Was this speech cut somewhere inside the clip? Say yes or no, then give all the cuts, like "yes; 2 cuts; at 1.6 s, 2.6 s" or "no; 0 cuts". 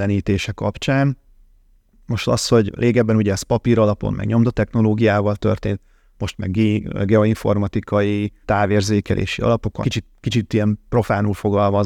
yes; 2 cuts; at 8.4 s, 9.8 s